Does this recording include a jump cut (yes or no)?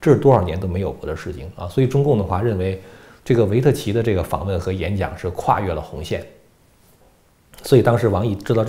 no